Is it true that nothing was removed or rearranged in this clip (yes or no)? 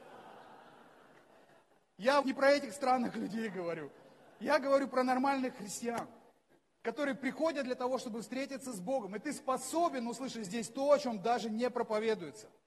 no